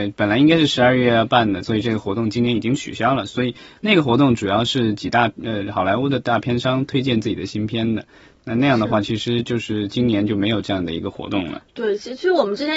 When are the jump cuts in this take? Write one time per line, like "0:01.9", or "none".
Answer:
0:01.6